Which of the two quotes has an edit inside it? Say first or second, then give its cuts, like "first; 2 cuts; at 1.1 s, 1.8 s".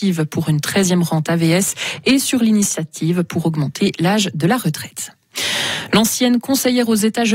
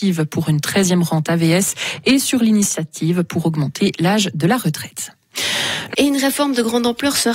second; 1 cut; at 5.9 s